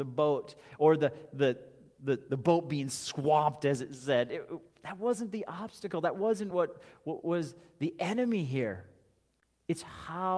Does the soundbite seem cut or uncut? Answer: uncut